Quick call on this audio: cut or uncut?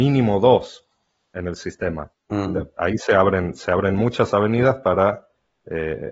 cut